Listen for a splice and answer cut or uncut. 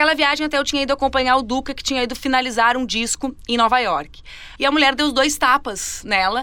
cut